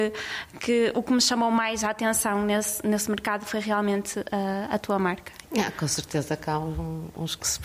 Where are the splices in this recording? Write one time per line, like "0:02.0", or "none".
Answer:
0:05.4